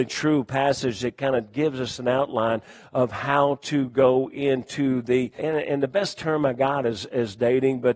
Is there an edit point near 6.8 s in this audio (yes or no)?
no